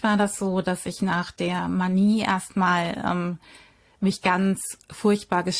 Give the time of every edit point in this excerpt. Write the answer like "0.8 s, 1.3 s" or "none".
none